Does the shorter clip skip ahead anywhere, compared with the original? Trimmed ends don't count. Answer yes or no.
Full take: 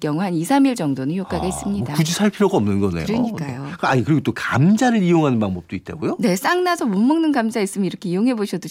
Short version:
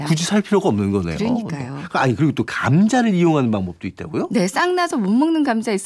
no